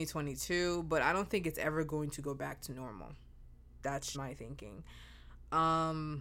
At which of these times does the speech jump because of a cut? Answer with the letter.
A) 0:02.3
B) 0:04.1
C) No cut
B